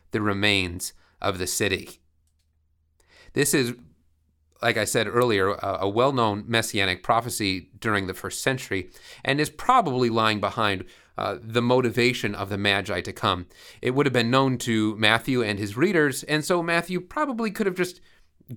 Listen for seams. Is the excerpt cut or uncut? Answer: uncut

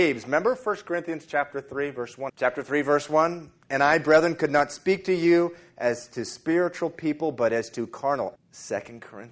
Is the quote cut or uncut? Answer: cut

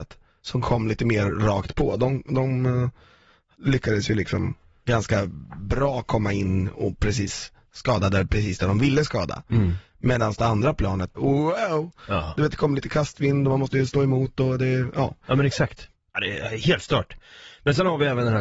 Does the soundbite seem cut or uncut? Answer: cut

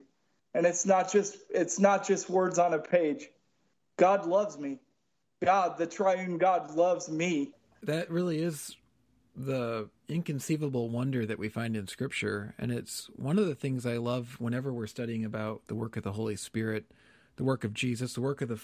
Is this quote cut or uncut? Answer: uncut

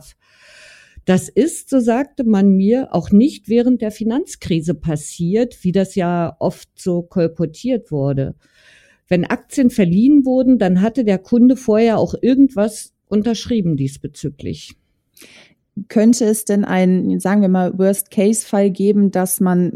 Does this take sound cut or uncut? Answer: uncut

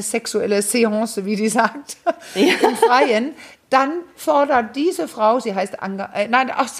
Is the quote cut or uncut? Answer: uncut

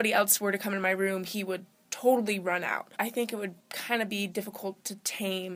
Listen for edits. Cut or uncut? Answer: cut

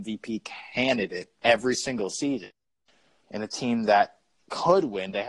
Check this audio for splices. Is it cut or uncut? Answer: cut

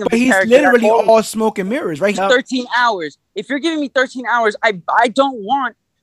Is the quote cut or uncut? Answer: cut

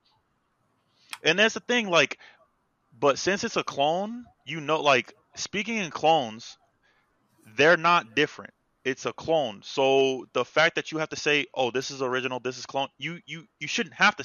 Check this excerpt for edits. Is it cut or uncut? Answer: uncut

